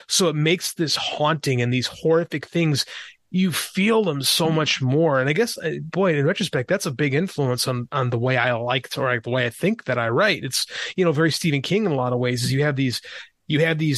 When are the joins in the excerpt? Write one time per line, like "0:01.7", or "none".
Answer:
none

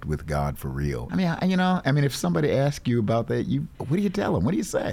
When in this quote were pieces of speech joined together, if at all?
0:01.1

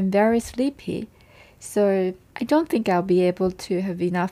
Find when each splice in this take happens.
none

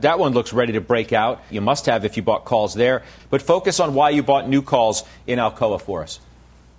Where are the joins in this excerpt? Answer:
0:01.5
0:03.2

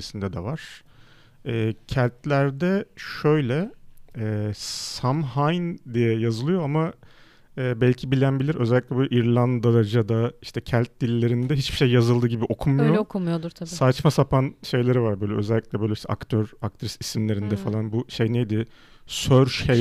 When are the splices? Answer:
none

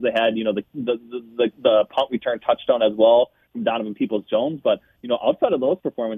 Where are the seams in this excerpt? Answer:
none

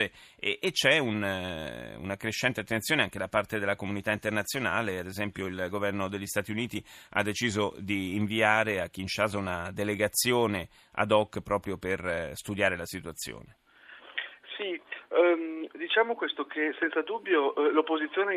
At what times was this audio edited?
none

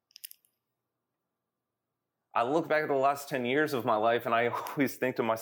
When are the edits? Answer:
none

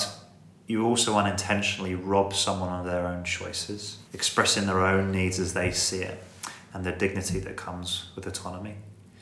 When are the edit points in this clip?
0:04.1

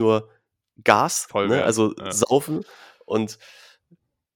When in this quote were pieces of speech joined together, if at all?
none

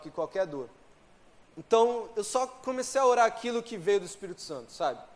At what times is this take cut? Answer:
0:01.4

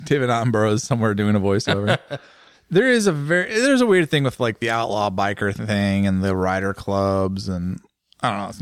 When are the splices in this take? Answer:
none

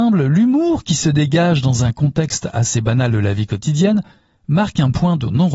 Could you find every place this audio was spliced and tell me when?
none

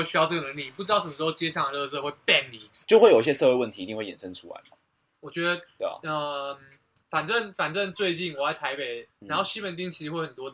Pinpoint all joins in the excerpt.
0:02.8
0:09.1

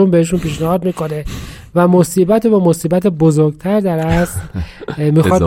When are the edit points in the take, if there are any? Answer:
none

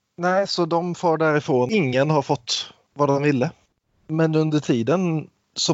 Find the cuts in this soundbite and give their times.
none

